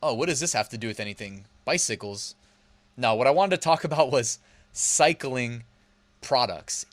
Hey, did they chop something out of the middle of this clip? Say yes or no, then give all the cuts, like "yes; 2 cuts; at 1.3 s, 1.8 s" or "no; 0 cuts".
no; 0 cuts